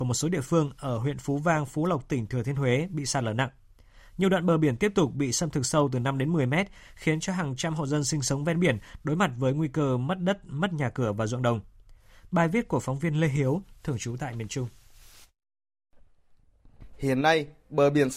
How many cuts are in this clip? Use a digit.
0